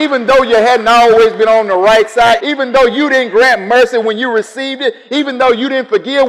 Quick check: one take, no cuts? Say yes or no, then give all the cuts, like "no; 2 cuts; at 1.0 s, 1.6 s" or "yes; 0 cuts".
no; 1 cut; at 2.4 s